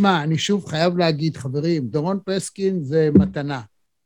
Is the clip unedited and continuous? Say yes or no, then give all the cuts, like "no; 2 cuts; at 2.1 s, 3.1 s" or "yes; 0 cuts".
no; 1 cut; at 1.9 s